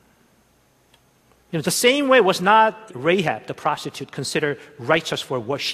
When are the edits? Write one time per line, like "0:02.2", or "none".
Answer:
0:01.6
0:02.9